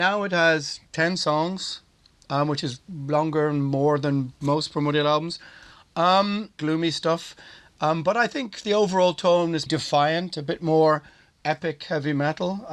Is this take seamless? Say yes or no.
no